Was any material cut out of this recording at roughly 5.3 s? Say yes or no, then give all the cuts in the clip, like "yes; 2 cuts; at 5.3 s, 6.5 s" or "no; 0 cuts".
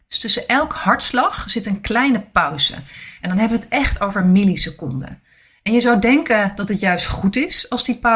no; 0 cuts